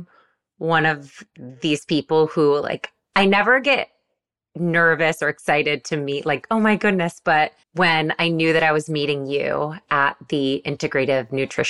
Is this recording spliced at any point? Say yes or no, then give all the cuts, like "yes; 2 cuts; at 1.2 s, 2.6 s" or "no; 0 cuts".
yes; 2 cuts; at 6.4 s, 7.6 s